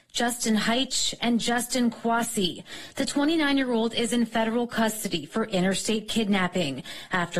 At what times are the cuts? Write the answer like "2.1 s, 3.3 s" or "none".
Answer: none

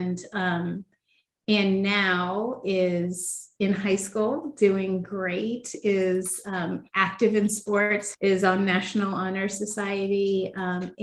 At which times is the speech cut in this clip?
8.1 s

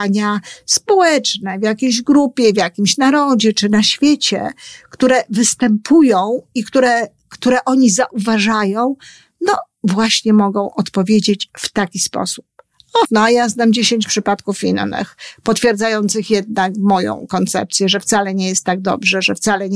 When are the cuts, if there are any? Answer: 13.0 s

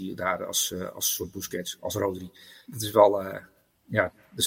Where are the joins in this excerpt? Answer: 2.6 s

